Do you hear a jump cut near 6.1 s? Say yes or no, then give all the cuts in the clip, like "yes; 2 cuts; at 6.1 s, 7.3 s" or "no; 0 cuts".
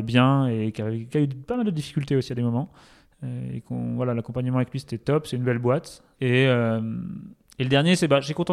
yes; 1 cut; at 6.1 s